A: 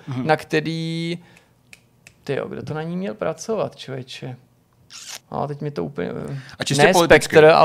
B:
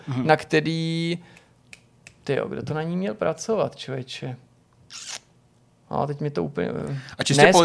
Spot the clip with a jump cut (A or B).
A